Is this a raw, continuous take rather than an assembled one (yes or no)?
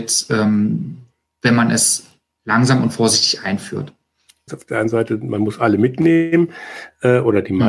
no